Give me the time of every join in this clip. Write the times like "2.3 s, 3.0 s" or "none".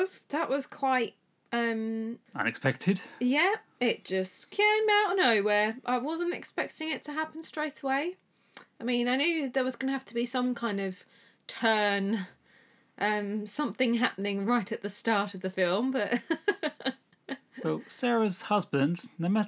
none